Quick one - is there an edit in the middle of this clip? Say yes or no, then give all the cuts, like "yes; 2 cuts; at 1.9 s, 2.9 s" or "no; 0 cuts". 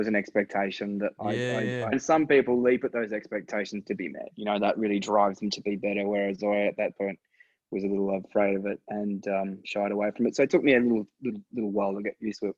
yes; 1 cut; at 1.9 s